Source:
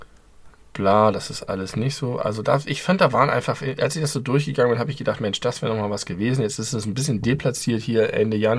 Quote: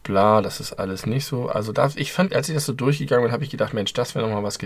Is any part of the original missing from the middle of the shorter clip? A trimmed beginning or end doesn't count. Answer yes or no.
yes